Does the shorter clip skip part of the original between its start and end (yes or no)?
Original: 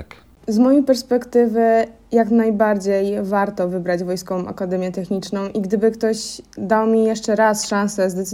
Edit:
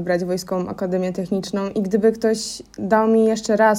no